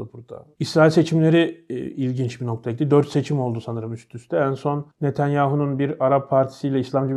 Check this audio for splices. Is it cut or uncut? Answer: uncut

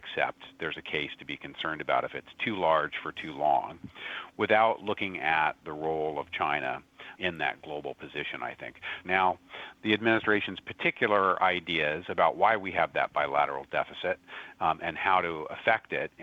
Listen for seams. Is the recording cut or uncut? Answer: cut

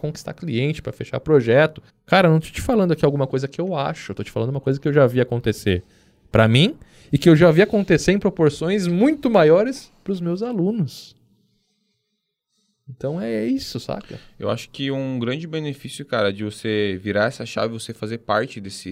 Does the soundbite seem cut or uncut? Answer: cut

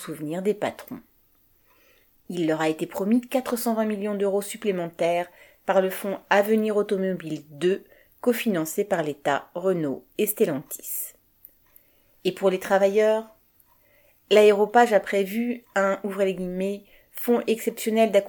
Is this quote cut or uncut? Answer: uncut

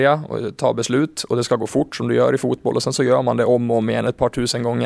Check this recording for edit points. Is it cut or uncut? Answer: uncut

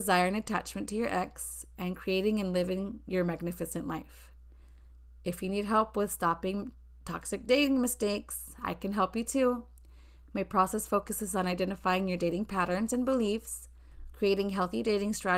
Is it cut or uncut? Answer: cut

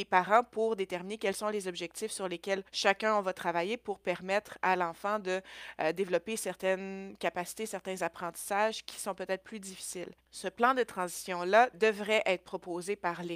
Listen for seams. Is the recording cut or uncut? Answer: cut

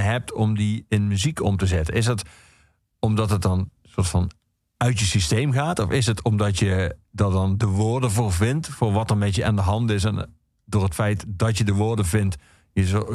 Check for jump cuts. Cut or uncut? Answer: uncut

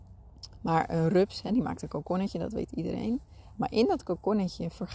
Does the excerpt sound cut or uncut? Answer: uncut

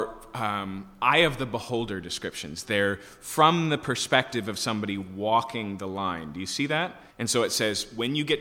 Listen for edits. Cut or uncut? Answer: cut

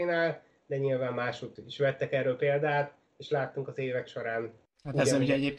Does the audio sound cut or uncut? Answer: uncut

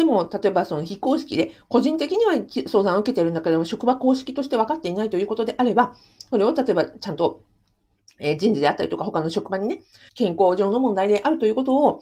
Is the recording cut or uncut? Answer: cut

